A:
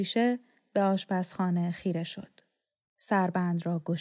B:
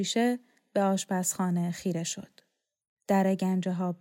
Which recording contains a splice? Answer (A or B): A